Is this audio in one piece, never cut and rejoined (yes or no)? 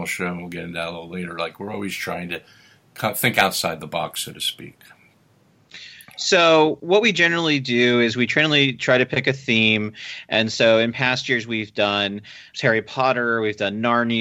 no